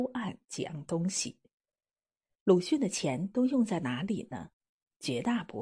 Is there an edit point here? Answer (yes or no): no